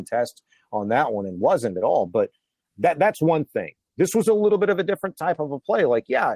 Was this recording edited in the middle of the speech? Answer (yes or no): yes